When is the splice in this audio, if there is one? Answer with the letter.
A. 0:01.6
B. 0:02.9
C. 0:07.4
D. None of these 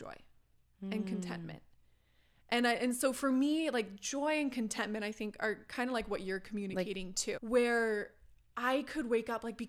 C